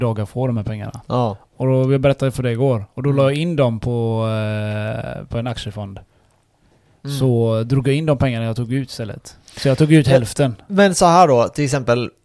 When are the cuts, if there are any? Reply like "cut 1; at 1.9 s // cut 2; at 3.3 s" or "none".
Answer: none

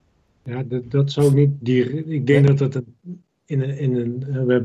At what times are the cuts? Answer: none

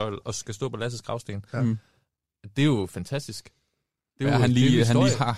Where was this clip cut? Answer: none

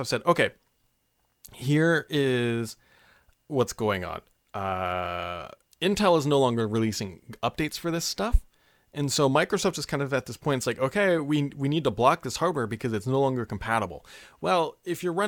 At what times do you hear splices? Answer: none

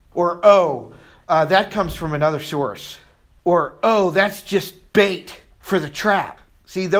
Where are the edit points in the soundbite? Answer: none

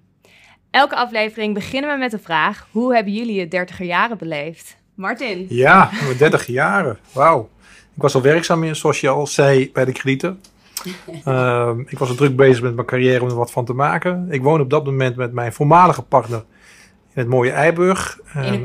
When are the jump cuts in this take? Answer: none

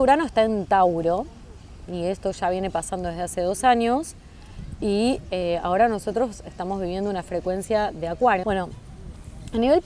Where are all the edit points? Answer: cut 1; at 8.4 s

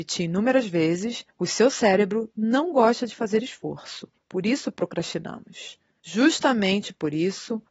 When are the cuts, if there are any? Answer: cut 1; at 4.2 s

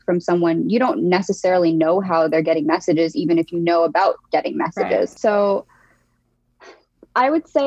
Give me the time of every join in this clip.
cut 1; at 5.2 s

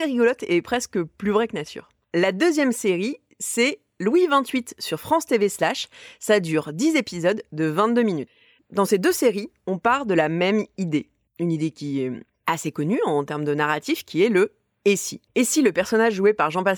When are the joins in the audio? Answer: none

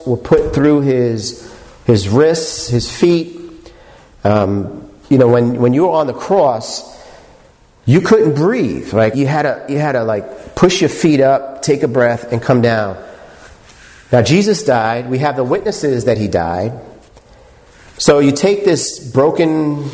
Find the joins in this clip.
cut 1; at 5.1 s // cut 2; at 9.1 s

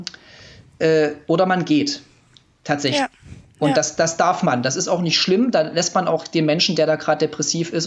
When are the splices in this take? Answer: none

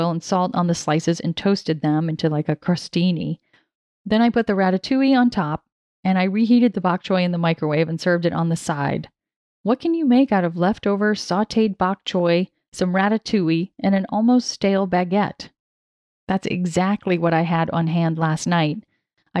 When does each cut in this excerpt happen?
cut 1; at 9.5 s

